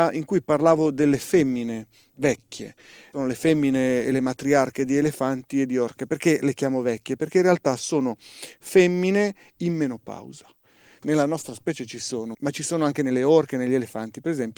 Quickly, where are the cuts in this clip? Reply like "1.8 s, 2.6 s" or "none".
11.0 s, 12.3 s